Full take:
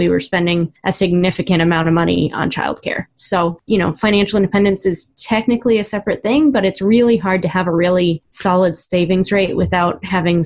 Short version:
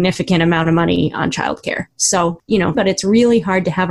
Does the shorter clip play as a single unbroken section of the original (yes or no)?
no